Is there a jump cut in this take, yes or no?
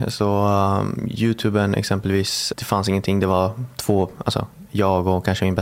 yes